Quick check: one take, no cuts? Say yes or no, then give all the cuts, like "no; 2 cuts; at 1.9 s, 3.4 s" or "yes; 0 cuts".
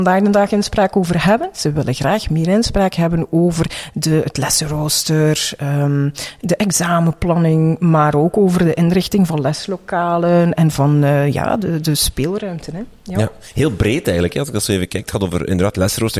yes; 0 cuts